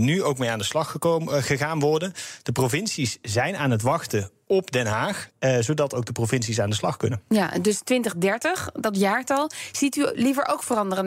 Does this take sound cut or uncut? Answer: cut